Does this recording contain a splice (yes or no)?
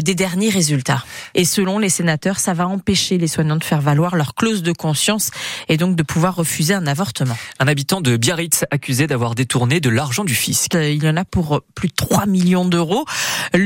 yes